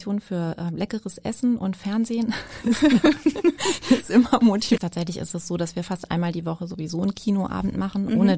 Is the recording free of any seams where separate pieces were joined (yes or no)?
no